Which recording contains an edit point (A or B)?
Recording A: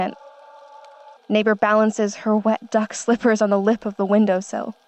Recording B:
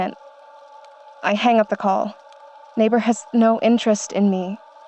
A